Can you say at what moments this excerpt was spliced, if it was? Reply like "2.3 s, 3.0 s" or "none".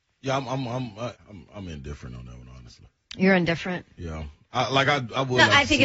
1.1 s